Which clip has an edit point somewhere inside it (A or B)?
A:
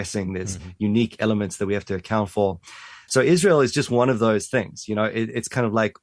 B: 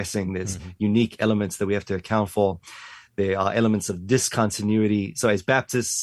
A